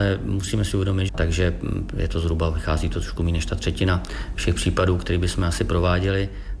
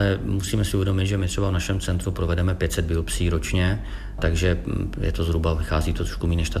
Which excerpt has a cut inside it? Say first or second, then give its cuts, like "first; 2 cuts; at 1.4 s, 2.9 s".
first; 1 cut; at 1.1 s